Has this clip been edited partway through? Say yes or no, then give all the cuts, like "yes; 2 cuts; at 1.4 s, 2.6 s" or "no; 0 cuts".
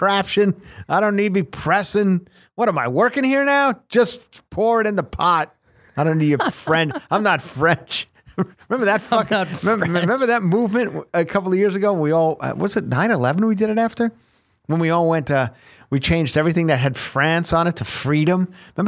no; 0 cuts